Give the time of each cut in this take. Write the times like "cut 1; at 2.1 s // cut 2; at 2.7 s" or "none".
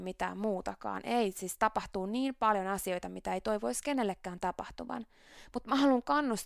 none